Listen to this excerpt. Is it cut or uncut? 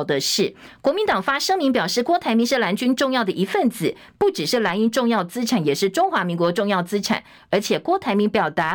uncut